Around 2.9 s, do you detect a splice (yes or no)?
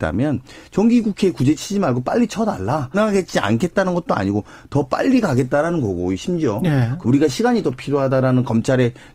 yes